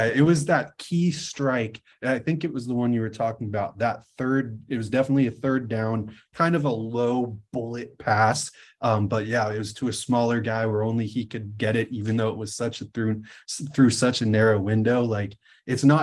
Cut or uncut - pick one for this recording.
uncut